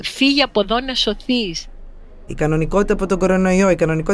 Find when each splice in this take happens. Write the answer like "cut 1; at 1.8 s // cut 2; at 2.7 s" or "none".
cut 1; at 2.3 s